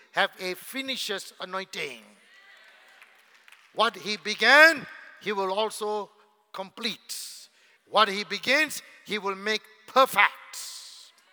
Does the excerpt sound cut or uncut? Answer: cut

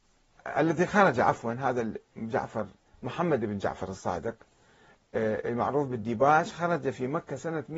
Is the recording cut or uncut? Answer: uncut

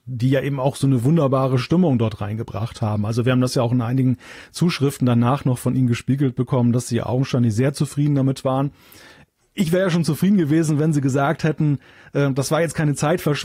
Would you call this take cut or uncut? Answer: uncut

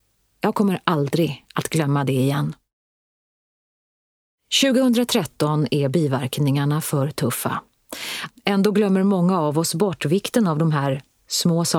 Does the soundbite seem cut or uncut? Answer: cut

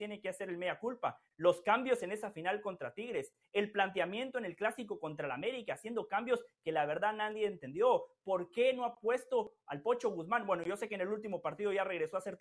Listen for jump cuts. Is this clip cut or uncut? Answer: uncut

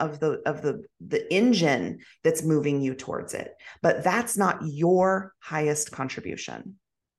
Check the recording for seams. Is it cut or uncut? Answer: uncut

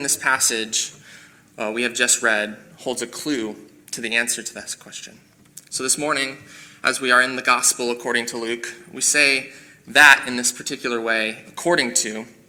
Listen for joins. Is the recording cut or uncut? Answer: uncut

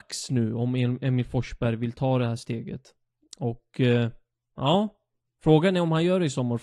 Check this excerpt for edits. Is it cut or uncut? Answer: uncut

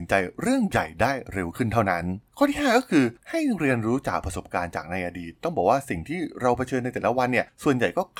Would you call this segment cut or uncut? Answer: cut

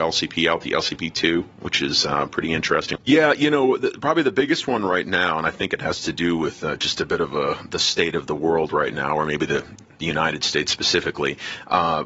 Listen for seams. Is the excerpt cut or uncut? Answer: cut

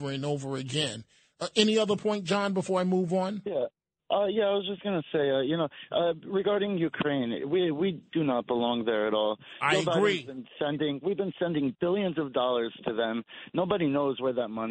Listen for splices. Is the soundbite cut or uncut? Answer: uncut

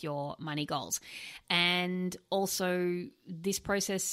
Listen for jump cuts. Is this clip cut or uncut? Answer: cut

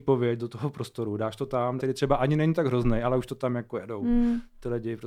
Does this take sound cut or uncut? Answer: cut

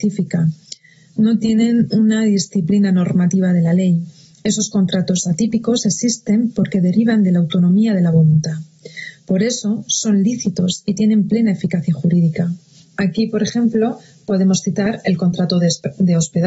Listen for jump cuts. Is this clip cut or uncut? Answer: uncut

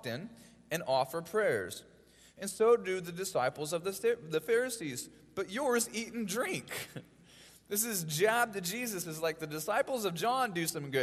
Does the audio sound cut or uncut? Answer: uncut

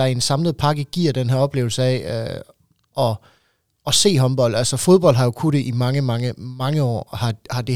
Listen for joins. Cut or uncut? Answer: uncut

